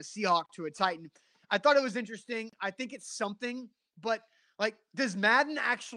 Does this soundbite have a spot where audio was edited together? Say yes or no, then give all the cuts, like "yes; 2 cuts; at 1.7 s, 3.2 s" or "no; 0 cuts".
no; 0 cuts